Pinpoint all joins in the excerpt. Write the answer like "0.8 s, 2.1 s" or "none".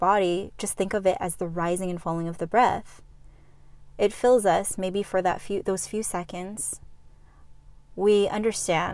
3.9 s